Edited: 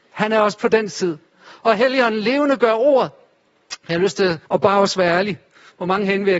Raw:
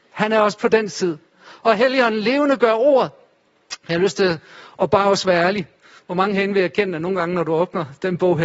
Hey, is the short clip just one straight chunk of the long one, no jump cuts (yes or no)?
no